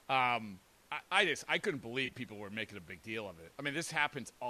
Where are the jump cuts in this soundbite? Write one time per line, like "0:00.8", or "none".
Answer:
0:01.1